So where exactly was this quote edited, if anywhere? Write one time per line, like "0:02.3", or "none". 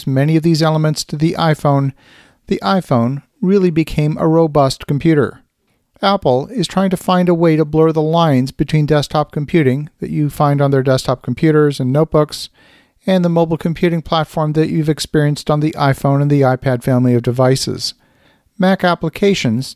none